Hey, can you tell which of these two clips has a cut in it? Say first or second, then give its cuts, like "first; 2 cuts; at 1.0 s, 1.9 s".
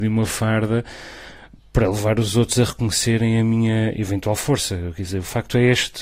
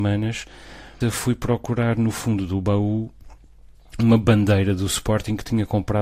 second; 1 cut; at 1.0 s